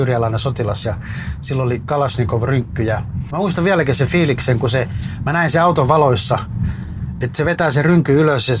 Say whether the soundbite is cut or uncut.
cut